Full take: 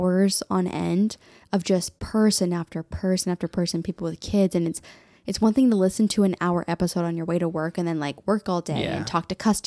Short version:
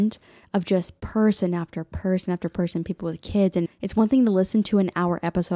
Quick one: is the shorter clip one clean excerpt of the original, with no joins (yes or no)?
no